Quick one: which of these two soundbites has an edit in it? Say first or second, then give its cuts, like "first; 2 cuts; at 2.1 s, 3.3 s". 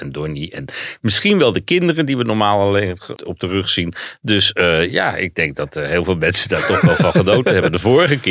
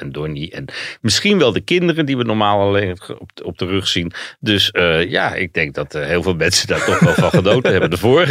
first; 1 cut; at 3.2 s